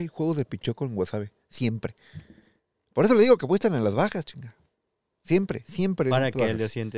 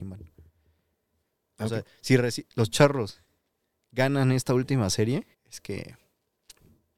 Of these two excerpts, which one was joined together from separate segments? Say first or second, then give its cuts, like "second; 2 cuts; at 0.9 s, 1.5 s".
second; 2 cuts; at 2.5 s, 5.3 s